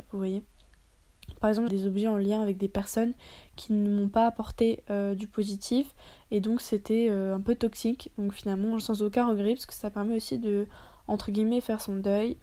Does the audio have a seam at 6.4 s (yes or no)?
no